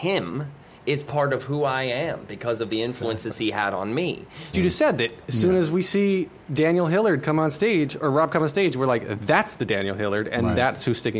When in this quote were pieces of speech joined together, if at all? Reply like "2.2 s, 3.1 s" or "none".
4.5 s